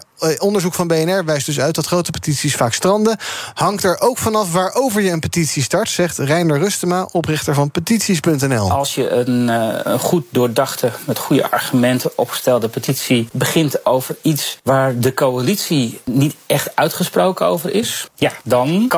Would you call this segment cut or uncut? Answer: uncut